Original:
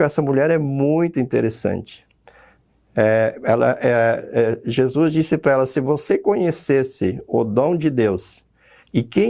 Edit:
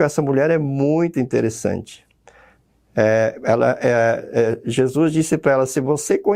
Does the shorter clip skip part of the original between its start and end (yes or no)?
no